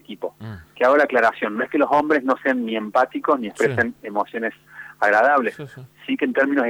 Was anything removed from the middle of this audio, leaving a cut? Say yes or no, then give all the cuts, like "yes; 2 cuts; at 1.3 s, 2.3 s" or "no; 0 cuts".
no; 0 cuts